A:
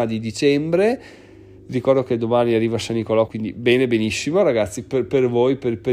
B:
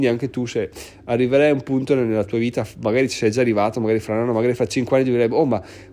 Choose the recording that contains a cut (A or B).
A